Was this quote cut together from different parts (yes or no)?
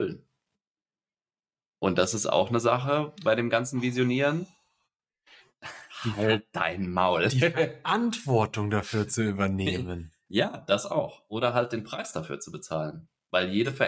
no